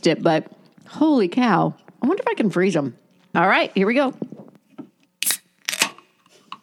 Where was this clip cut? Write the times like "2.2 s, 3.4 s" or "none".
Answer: 3.3 s